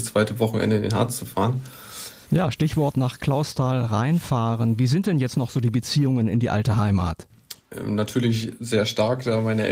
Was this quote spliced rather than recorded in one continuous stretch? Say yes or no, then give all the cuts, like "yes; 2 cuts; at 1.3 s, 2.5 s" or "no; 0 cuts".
yes; 1 cut; at 2.3 s